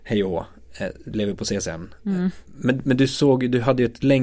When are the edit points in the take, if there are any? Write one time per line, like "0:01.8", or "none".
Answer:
none